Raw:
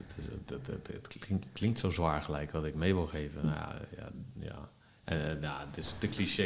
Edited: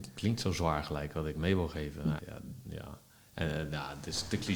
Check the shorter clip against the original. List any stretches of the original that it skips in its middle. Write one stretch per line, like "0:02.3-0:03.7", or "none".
0:03.6-0:03.9